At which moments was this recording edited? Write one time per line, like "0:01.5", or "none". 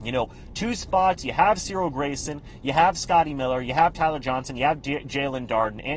none